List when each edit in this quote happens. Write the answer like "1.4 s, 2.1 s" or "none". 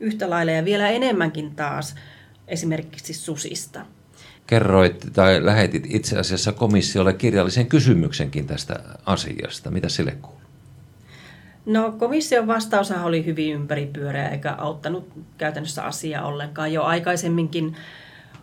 4.4 s